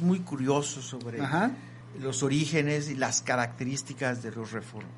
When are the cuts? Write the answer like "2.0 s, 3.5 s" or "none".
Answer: none